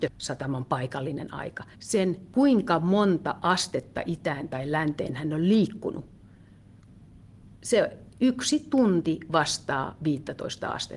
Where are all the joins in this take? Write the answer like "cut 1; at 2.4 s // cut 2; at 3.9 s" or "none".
cut 1; at 1.7 s